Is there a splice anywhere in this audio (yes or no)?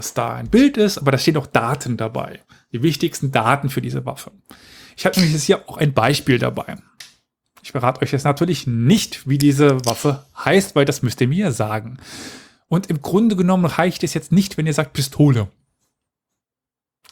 no